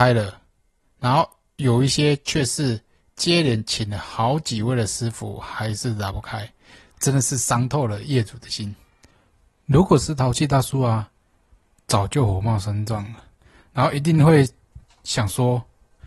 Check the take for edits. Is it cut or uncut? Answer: uncut